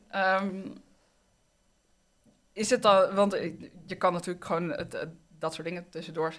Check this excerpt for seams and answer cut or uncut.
uncut